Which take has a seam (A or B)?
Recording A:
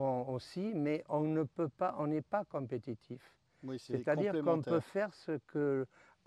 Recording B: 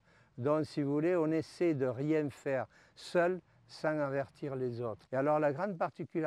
B